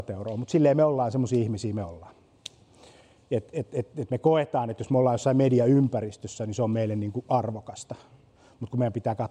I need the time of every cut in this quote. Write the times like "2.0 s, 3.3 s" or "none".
none